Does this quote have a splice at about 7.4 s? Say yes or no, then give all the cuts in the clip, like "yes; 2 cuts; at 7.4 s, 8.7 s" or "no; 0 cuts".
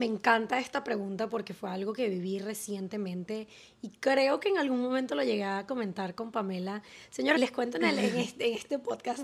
yes; 1 cut; at 7.4 s